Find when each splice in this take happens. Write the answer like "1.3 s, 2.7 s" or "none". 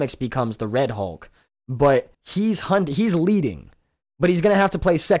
2.1 s

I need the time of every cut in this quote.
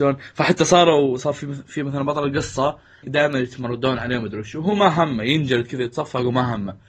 3.0 s

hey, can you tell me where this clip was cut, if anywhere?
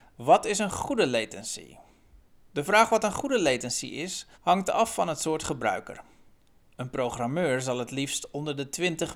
4.3 s

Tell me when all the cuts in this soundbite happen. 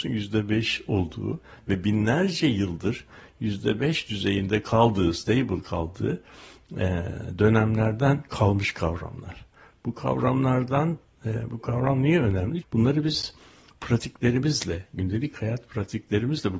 12.6 s

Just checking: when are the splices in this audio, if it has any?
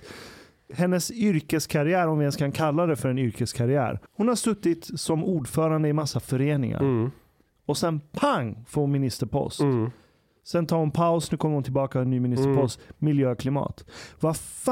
4.1 s

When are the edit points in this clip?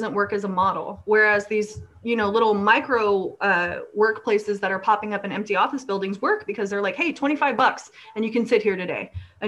none

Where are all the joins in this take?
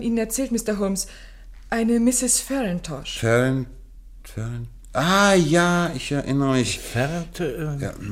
none

